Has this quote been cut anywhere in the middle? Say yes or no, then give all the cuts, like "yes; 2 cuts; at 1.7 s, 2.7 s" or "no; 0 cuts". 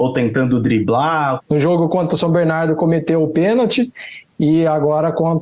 yes; 1 cut; at 1.4 s